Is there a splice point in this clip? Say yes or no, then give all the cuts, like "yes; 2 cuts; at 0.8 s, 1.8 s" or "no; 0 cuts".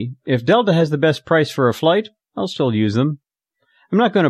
no; 0 cuts